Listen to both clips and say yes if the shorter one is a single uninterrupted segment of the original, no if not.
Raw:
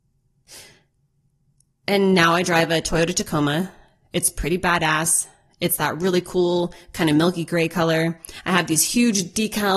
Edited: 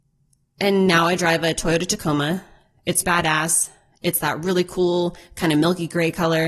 no